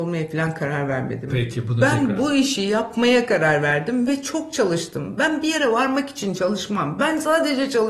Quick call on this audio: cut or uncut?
uncut